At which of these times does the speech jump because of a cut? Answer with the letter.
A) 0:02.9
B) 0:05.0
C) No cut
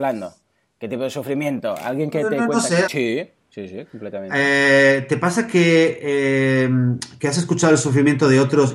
A